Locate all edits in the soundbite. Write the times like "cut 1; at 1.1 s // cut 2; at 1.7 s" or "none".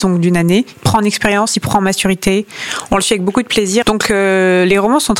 cut 1; at 3.8 s